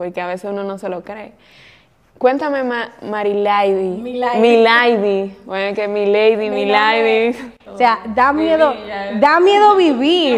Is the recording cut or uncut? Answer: cut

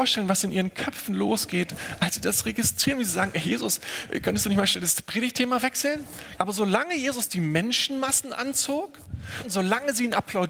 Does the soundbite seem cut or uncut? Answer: cut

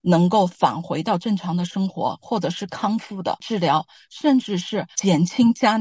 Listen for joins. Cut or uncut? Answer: uncut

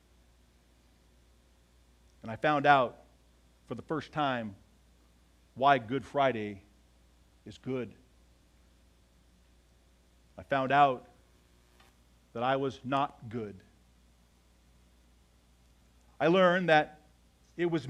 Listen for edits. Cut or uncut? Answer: uncut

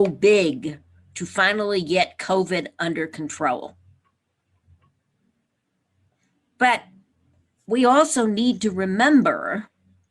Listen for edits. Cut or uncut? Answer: uncut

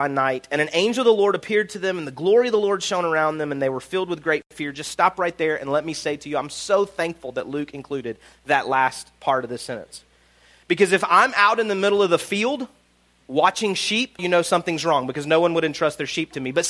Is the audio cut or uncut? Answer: cut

